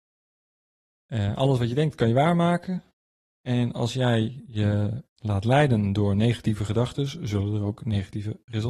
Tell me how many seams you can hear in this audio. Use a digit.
1